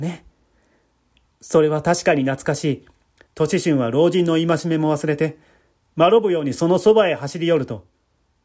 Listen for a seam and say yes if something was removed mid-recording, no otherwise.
yes